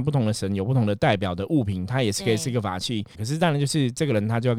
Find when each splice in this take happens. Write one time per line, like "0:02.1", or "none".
0:03.2